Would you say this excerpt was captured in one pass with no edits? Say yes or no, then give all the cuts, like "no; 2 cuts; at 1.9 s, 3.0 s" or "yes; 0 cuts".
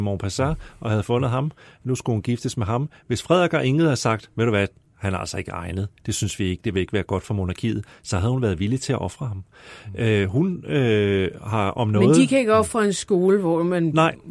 yes; 0 cuts